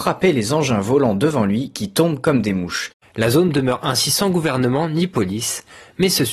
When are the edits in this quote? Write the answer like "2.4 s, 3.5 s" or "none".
3.0 s